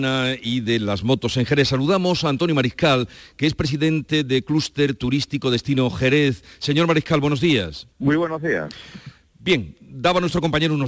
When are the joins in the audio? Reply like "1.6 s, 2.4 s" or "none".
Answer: 7.9 s